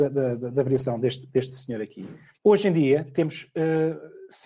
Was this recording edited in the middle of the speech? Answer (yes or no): yes